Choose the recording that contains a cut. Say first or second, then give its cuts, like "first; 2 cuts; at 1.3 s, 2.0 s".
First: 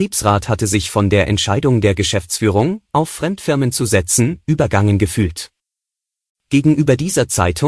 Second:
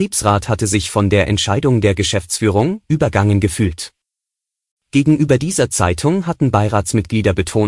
second; 1 cut; at 2.8 s